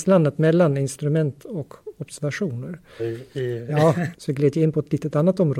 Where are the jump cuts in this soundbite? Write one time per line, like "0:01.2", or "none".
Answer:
0:03.0
0:04.1